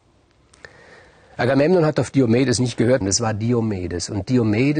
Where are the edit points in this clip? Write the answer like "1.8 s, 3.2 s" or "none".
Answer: 3.0 s